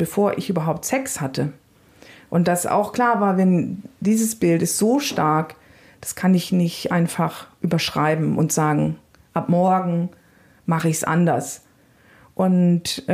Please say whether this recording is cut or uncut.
uncut